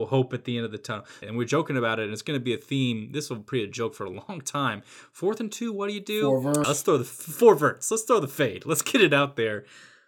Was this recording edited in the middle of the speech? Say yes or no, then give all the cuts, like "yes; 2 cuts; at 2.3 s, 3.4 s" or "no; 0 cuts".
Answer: yes; 2 cuts; at 1.2 s, 6.6 s